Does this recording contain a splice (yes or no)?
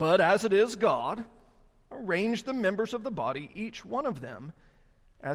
no